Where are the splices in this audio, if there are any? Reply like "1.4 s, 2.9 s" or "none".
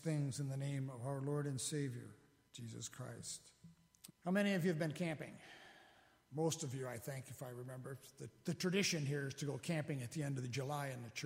4.1 s